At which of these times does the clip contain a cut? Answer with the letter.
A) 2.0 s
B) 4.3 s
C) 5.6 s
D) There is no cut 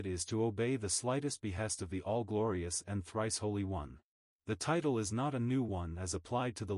B